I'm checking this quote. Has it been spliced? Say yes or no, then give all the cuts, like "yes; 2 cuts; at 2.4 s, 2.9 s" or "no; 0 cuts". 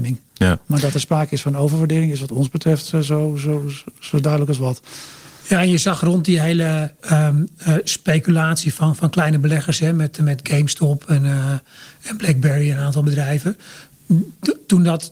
yes; 1 cut; at 7.0 s